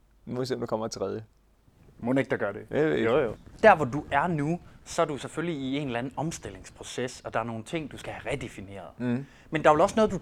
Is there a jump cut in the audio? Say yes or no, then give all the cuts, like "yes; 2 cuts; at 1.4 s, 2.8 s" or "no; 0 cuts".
no; 0 cuts